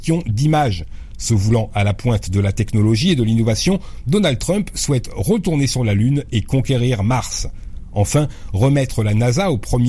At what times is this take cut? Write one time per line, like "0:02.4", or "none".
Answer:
none